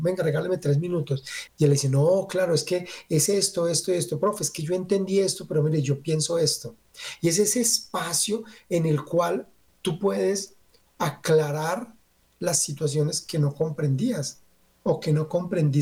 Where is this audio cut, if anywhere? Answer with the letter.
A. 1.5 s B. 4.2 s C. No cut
A